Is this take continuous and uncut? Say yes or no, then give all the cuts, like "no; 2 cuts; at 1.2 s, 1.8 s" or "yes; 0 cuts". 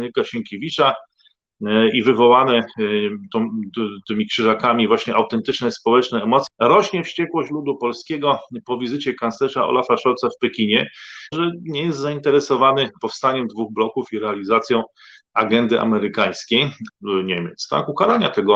no; 3 cuts; at 6.5 s, 11.3 s, 16.9 s